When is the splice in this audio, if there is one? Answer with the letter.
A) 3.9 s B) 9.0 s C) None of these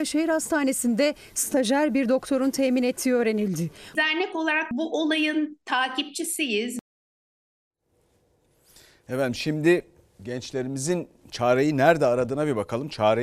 A